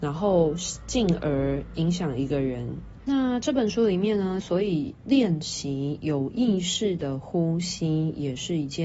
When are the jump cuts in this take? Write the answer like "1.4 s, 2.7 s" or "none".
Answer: 3.0 s, 4.4 s